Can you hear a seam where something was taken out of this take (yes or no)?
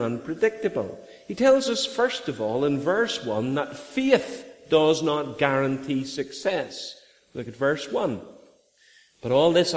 no